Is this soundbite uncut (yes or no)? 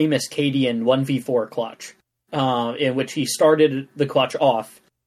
yes